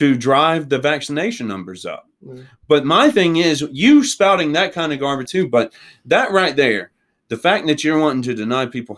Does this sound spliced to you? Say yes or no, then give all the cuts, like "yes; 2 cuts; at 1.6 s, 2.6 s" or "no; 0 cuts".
yes; 1 cut; at 5.2 s